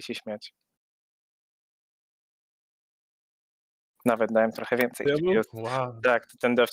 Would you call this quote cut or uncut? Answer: cut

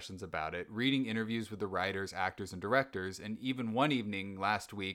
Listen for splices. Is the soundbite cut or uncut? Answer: uncut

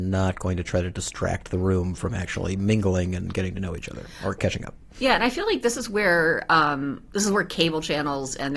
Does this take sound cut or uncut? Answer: uncut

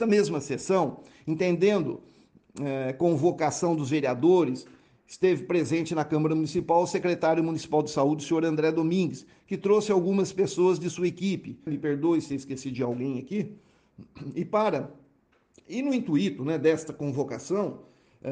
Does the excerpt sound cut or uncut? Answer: cut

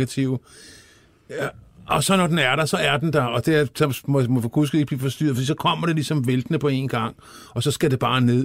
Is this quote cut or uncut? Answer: uncut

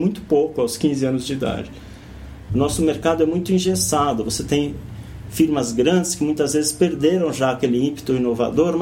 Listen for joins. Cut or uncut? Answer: cut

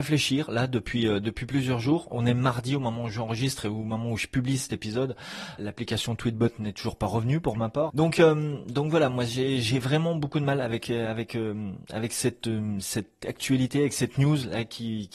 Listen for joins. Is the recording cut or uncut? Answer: cut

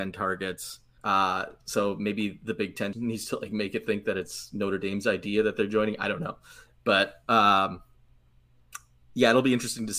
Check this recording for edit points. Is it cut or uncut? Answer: cut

